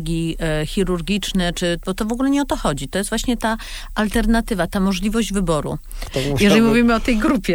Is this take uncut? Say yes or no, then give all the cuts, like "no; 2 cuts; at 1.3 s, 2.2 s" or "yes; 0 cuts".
no; 1 cut; at 6.0 s